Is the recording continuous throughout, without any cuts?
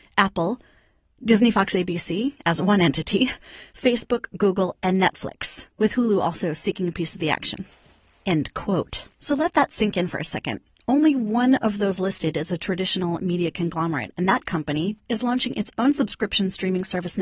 no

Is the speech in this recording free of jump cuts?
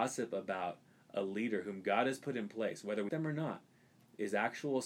no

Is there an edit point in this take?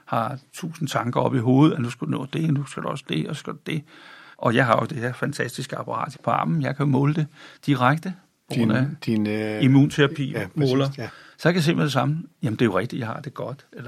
yes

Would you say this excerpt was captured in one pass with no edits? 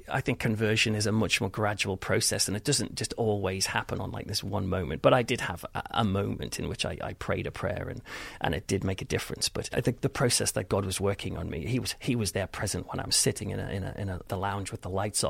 yes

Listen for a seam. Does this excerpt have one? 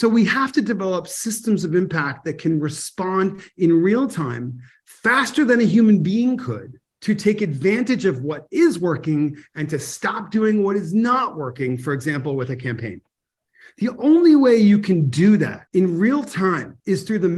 no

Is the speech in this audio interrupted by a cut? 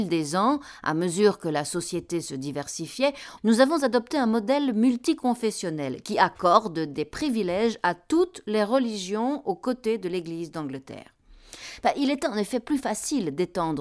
yes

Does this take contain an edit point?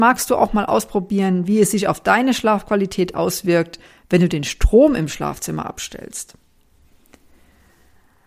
no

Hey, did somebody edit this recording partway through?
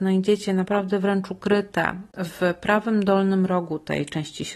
no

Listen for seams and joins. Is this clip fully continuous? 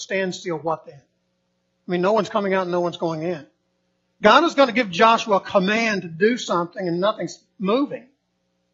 yes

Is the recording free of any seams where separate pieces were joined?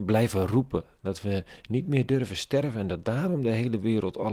yes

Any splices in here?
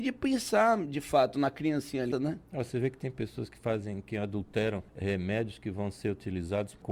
yes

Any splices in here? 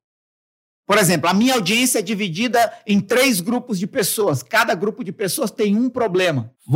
no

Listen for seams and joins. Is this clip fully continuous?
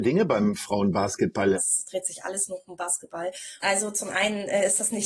no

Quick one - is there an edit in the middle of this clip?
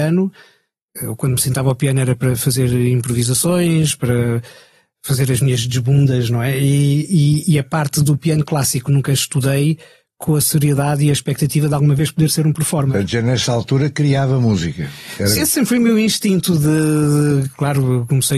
yes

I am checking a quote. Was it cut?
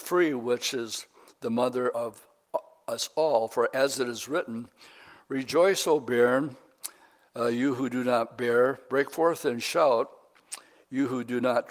no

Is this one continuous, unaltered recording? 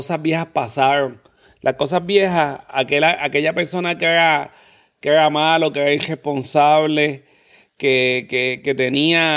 yes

